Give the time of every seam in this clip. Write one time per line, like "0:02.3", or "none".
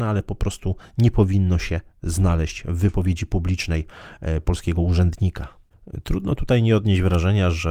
0:04.4